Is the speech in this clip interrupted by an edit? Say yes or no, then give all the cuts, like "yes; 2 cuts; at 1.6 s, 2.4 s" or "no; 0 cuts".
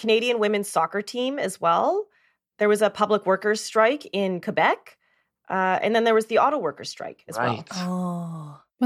no; 0 cuts